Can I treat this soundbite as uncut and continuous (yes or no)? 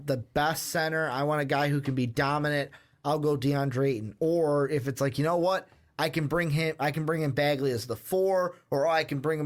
yes